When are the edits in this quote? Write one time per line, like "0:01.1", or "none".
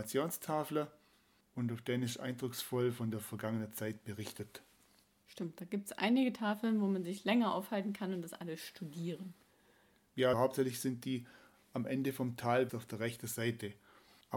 0:10.3
0:12.7